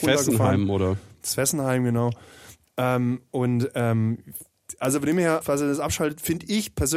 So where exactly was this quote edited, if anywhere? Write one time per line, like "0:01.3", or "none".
0:05.4